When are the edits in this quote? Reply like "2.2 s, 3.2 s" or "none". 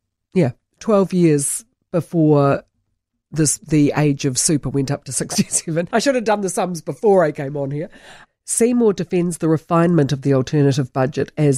5.9 s, 8.2 s